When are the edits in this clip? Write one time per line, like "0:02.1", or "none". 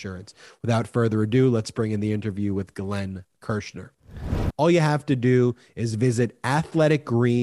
0:04.5